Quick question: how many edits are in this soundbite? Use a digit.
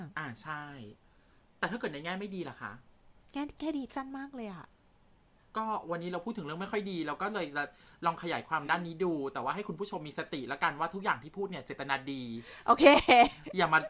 0